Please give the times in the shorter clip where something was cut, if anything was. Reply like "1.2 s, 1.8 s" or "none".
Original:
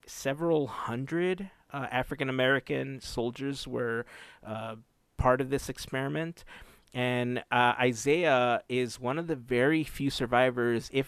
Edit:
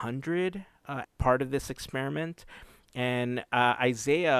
1.0 s